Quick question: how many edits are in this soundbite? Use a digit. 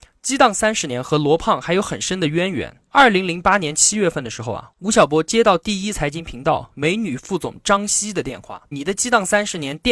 2